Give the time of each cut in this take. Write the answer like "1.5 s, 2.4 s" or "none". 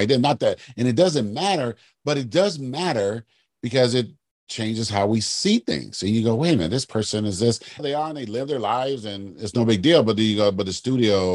7.8 s